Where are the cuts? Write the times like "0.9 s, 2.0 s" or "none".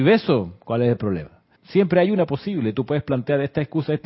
1.5 s